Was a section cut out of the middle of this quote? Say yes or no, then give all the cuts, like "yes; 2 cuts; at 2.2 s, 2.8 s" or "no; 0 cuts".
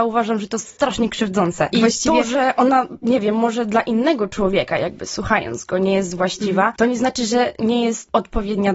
yes; 1 cut; at 1.7 s